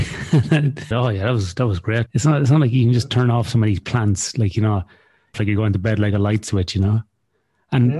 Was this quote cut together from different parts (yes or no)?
yes